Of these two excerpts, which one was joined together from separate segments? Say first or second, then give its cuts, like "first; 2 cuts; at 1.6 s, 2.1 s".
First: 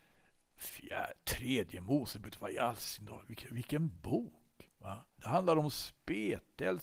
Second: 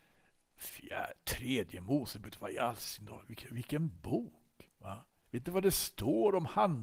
first; 1 cut; at 5.2 s